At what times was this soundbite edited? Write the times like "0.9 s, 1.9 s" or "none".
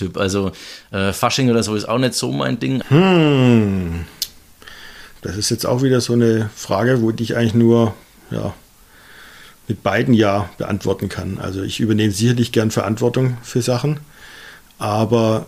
2.8 s, 5.2 s

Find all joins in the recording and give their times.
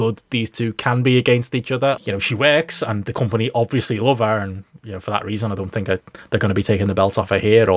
2.0 s

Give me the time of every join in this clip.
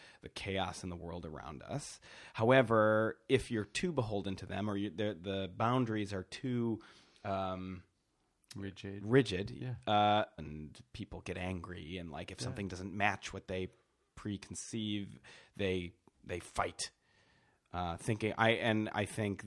10.4 s

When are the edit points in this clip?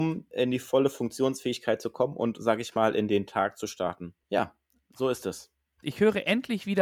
4.2 s, 5.8 s

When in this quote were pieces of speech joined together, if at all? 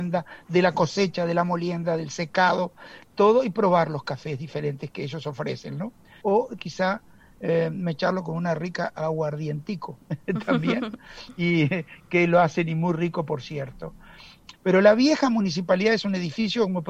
6.2 s, 14.5 s

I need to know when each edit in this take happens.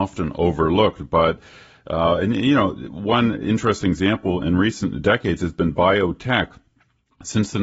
none

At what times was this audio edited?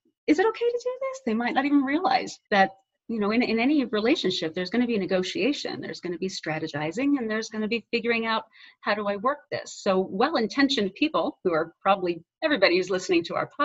2.5 s

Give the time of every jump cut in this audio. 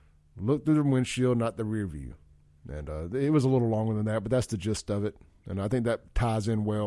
none

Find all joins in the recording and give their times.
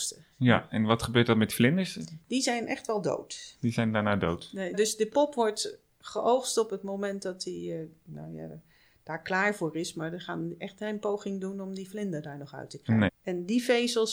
4.7 s, 13.1 s

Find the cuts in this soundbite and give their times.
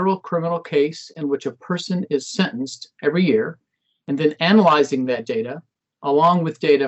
none

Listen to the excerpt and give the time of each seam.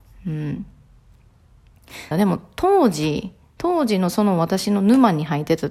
2.1 s

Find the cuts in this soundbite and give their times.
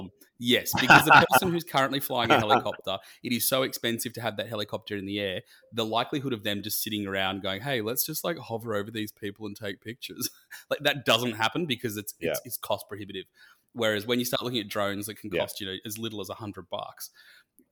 none

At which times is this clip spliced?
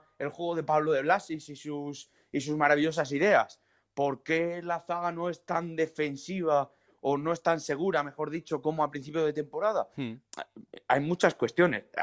none

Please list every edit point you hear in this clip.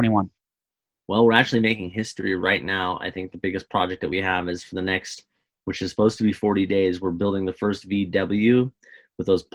none

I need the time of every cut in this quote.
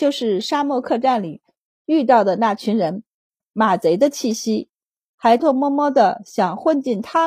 5.4 s

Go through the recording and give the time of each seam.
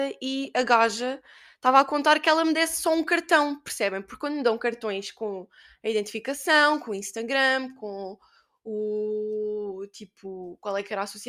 none

